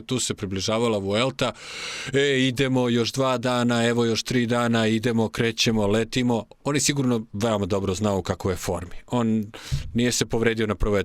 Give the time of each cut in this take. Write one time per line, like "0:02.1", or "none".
none